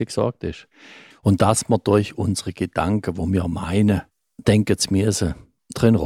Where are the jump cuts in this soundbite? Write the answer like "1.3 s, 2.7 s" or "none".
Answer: 1.1 s